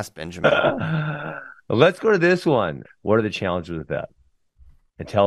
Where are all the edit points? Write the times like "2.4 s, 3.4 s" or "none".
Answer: 2.8 s